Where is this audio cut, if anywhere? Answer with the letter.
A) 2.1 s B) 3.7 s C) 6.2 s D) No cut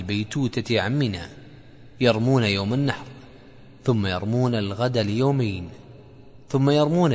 D